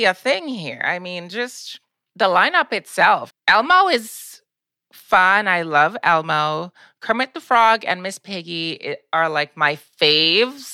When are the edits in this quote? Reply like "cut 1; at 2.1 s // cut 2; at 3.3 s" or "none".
cut 1; at 3.3 s

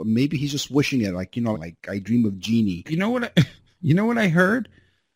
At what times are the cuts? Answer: cut 1; at 1.5 s // cut 2; at 2.8 s

